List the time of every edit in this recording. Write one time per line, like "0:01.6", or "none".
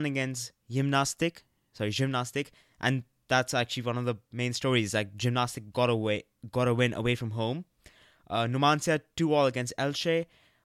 none